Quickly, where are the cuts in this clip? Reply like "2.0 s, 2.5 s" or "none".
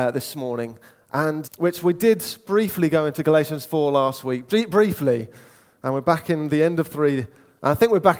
1.4 s